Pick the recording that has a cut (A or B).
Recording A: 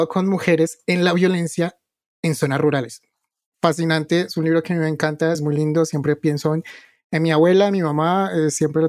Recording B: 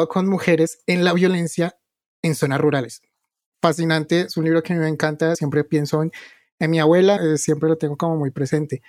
B